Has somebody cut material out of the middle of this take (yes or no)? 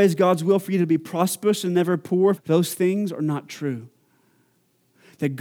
yes